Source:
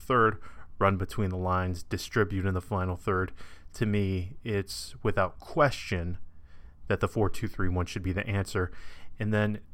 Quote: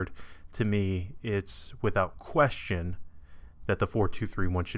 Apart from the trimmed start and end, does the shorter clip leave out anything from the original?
no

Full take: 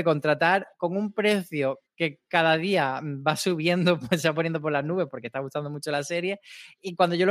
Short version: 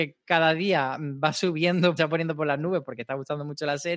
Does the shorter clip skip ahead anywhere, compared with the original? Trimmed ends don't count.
yes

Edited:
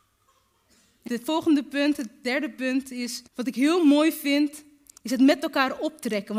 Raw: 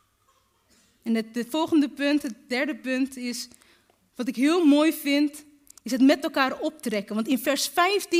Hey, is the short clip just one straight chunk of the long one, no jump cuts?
no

